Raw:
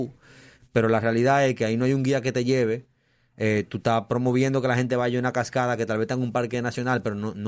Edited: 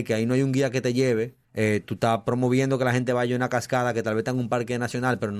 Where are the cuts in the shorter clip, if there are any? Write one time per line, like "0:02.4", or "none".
0:01.4